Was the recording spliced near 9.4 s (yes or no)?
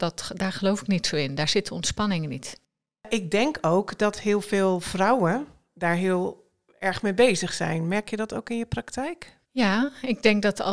yes